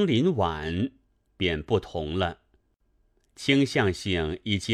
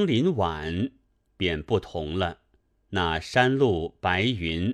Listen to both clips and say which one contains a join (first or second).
second